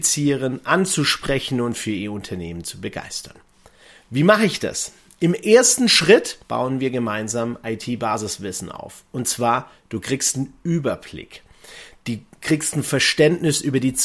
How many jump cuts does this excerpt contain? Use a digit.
1